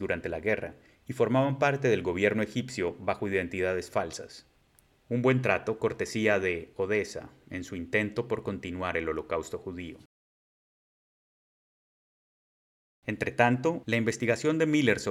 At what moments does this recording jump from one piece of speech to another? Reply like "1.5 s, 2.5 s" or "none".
4.9 s, 13.8 s